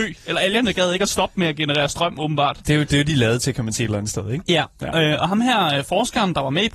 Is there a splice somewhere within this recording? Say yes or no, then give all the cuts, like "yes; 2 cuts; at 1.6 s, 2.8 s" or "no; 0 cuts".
no; 0 cuts